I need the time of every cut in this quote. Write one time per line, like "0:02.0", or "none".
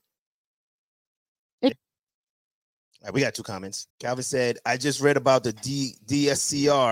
0:01.7
0:03.9